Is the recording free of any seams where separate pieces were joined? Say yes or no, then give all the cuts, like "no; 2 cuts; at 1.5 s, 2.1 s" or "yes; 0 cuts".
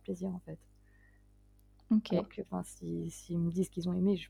yes; 0 cuts